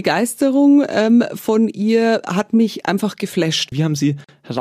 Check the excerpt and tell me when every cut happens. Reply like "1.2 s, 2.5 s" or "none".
3.7 s